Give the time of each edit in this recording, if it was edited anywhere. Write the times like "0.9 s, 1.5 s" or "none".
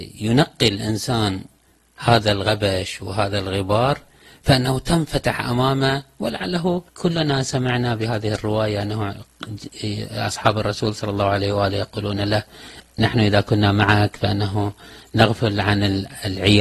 6.9 s